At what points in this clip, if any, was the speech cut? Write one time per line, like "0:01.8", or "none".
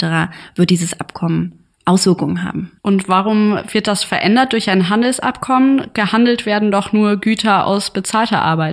0:02.8